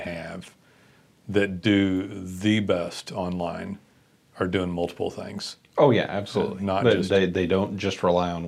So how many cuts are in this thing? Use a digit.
0